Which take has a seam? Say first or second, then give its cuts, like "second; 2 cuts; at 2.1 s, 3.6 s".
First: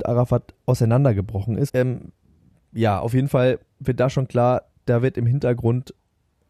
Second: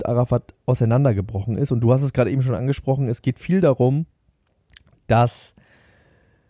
first; 1 cut; at 1.7 s